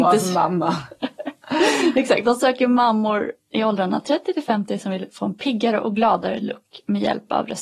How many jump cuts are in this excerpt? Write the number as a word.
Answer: zero